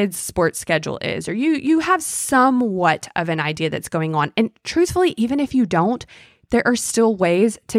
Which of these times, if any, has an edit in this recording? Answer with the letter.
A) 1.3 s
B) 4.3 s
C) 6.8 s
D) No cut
D